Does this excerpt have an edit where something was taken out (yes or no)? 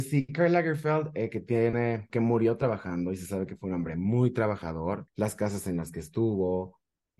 yes